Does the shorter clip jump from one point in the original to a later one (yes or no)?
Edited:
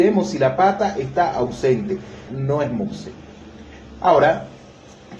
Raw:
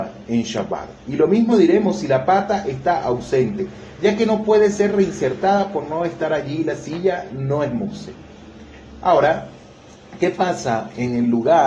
yes